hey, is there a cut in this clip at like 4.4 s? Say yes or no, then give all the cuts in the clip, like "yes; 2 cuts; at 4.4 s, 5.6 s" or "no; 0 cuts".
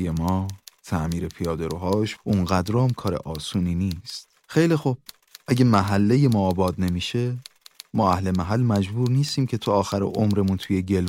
yes; 2 cuts; at 2.2 s, 4.4 s